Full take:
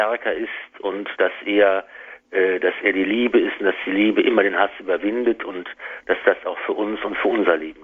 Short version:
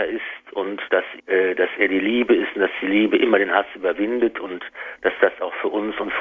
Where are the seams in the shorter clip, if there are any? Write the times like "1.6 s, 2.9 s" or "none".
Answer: 1.2 s